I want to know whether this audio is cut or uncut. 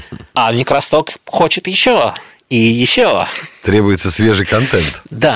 uncut